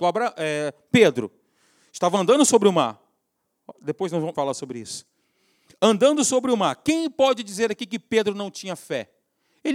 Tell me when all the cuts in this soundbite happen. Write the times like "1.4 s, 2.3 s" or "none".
4.3 s

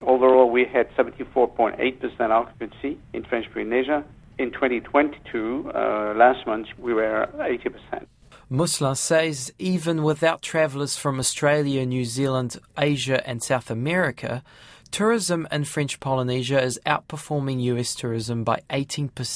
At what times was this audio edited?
none

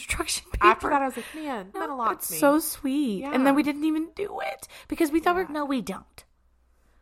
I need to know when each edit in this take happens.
1.7 s, 5.4 s

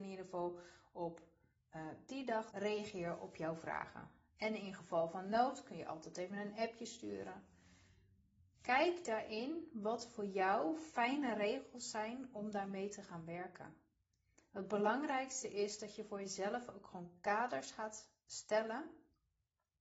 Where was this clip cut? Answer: 2.5 s

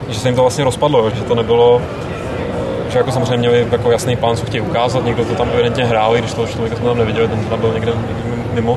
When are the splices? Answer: 1.1 s

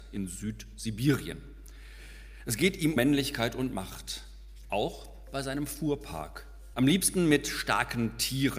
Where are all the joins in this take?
3.0 s, 6.7 s

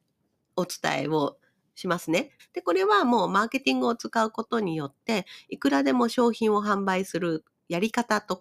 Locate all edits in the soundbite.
2.4 s

